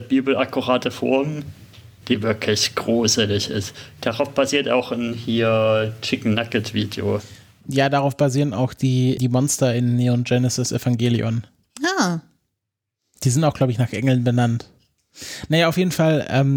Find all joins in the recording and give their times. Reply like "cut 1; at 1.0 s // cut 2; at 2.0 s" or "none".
cut 1; at 9.2 s